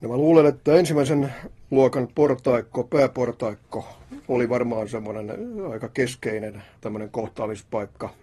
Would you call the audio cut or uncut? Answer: uncut